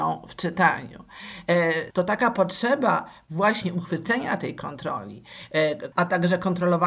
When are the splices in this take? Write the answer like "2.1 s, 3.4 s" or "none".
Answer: 1.9 s, 5.9 s